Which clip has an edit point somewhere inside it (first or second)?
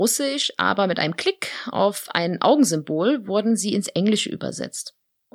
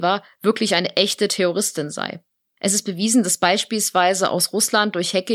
second